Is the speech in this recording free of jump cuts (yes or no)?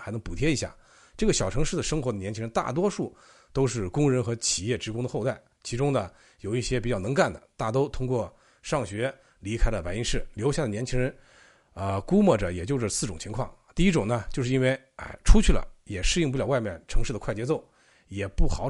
yes